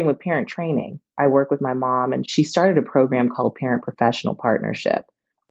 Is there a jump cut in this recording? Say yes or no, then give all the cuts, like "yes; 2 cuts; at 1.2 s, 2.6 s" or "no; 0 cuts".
no; 0 cuts